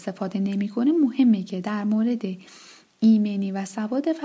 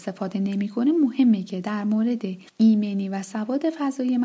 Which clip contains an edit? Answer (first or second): second